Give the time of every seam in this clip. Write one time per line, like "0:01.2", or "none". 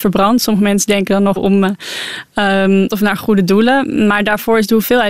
0:01.4
0:02.9